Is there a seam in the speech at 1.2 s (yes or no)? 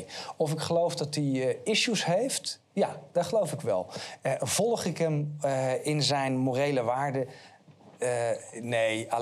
no